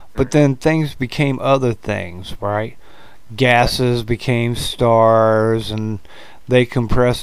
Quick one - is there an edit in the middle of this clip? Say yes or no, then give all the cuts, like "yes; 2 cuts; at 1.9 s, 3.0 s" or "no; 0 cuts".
no; 0 cuts